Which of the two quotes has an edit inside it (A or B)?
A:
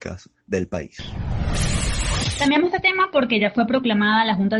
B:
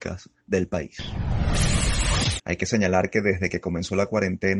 B